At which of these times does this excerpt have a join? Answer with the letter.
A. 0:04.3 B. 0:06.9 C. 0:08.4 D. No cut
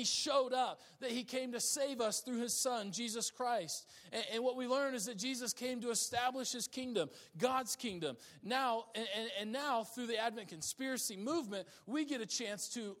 D